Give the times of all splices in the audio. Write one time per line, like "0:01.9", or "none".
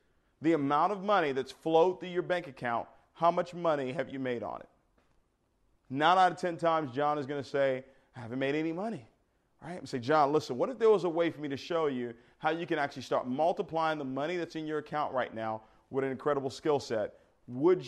none